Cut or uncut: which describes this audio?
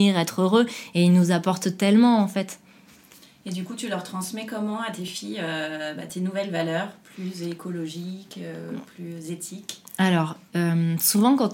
uncut